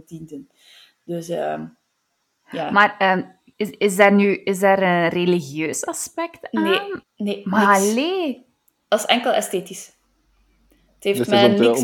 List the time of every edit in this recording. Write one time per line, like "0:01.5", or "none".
0:03.5
0:07.0